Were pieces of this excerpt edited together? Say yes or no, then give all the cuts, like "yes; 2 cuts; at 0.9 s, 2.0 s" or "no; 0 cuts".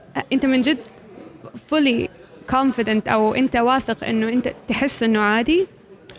no; 0 cuts